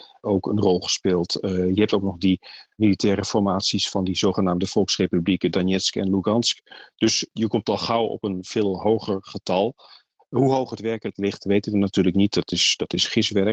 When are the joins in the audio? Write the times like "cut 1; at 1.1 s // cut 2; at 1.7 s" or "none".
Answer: cut 1; at 6.9 s